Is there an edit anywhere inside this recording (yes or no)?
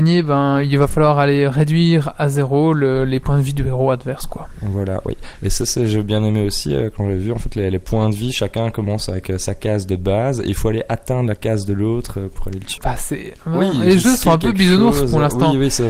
yes